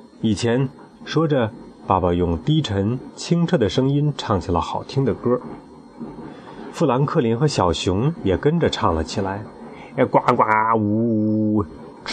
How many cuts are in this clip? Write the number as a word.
one